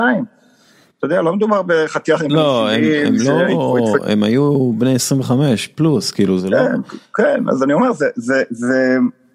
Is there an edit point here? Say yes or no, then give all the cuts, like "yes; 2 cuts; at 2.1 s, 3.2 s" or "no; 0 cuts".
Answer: no; 0 cuts